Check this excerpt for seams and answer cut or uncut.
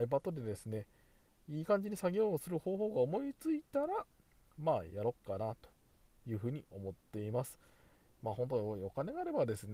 uncut